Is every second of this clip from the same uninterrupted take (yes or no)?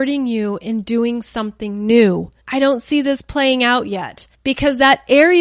no